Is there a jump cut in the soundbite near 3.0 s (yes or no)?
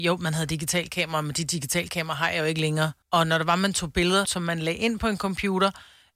yes